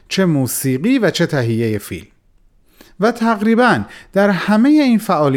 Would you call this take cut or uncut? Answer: uncut